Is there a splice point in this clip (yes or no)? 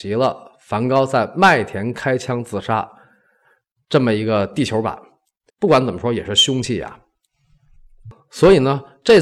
yes